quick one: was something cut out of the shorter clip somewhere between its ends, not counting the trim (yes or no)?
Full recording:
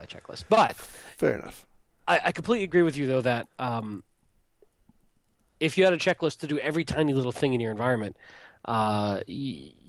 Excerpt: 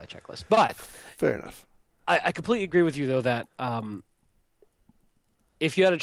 no